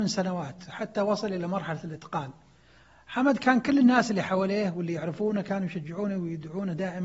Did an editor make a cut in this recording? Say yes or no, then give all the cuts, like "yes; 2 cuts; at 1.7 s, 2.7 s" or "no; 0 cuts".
no; 0 cuts